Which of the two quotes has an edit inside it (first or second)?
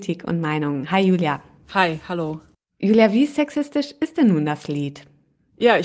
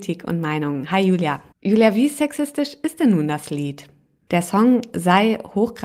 second